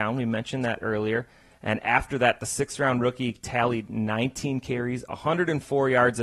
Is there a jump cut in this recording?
no; 0 cuts

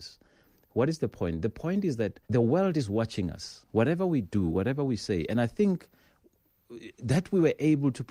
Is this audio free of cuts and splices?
no; 1 cut; at 2.2 s

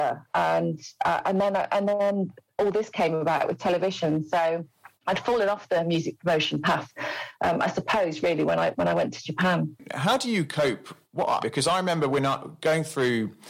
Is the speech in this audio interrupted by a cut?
yes; 1 cut; at 11.4 s

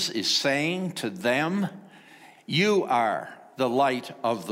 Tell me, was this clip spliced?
yes; 1 cut; at 2.4 s

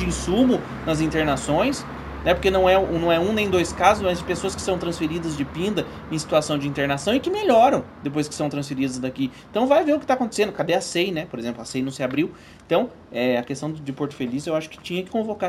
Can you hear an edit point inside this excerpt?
no; 0 cuts

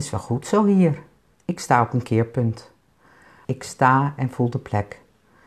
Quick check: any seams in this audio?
yes; 2 cuts; at 1.3 s, 3.4 s

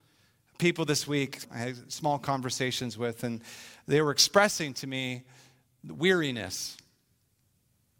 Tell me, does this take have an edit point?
yes; 1 cut; at 1.4 s

